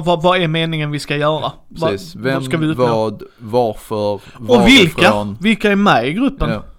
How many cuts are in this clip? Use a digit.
0